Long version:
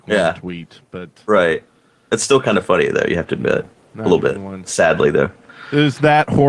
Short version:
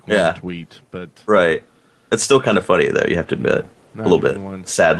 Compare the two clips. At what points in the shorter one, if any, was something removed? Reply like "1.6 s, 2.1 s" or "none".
none